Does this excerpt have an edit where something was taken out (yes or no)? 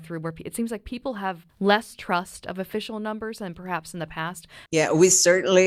yes